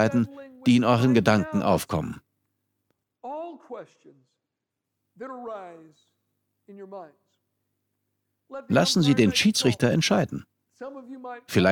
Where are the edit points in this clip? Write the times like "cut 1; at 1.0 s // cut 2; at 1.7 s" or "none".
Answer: none